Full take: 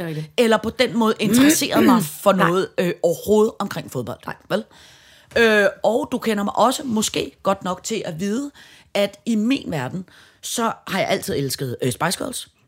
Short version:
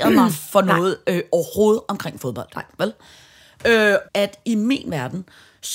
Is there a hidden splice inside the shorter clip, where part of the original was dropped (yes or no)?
yes